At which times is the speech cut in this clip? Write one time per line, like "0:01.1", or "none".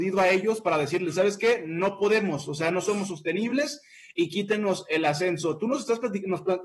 none